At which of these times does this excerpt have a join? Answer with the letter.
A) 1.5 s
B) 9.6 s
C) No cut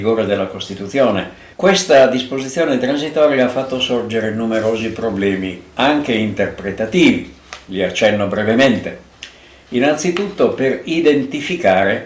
A